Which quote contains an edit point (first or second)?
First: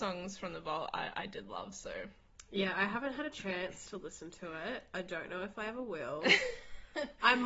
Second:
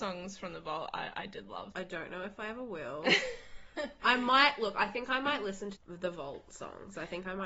second